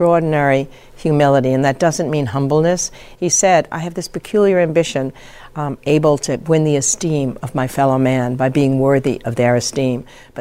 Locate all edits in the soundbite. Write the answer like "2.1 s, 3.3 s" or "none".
3.1 s, 5.8 s